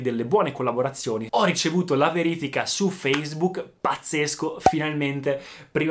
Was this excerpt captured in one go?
no; 1 cut; at 1.3 s

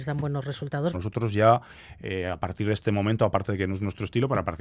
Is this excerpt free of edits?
no; 1 cut; at 0.9 s

